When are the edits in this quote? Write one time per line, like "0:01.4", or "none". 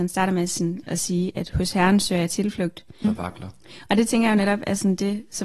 0:03.0

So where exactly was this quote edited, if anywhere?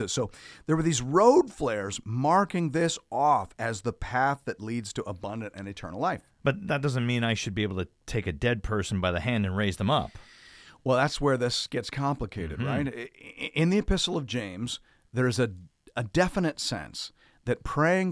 none

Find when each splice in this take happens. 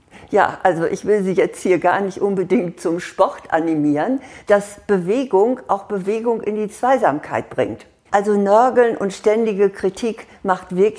0:04.4
0:08.1

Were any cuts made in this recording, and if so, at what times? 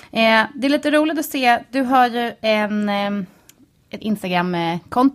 0:04.0

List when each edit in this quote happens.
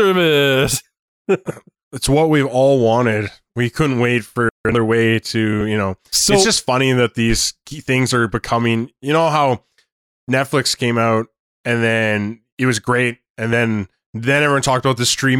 none

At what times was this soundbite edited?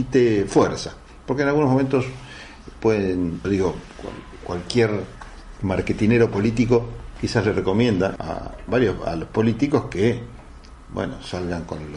0:03.4
0:08.2

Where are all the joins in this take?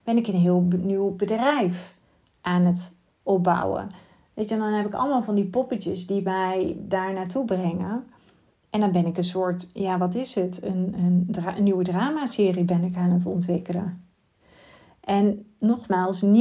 0:11.0

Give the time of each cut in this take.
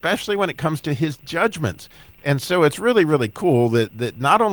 0:02.1

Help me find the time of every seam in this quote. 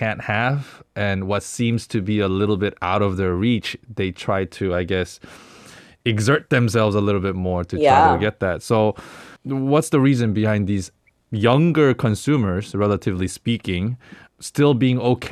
0:09.4
0:14.3

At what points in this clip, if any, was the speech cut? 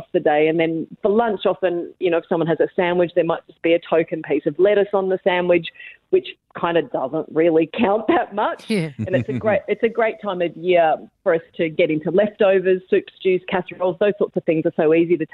none

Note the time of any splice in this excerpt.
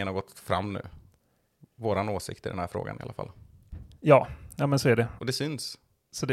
0:05.2

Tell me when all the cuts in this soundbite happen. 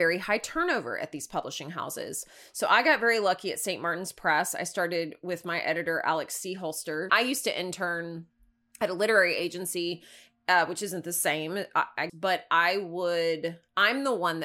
0:07.1
0:12.1

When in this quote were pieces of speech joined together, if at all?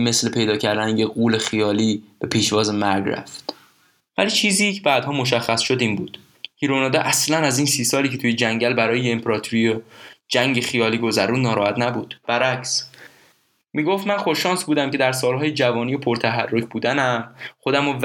none

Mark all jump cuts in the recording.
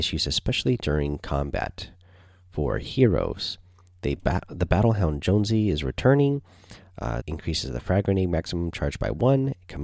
0:07.2

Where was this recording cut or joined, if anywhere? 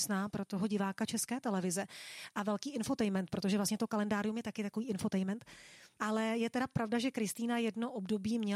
0:06.0

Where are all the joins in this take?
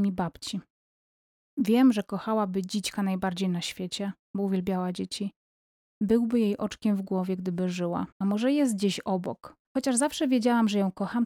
0:08.1
0:09.6

